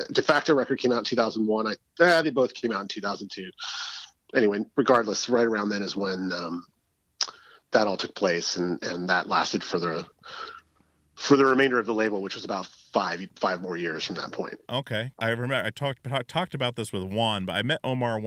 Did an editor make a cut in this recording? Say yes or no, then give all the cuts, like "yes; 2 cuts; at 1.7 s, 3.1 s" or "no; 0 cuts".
yes; 2 cuts; at 2.2 s, 15.1 s